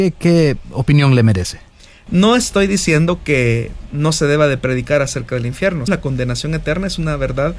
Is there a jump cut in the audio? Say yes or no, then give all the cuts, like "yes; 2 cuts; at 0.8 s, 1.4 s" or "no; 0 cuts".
yes; 2 cuts; at 2.1 s, 5.9 s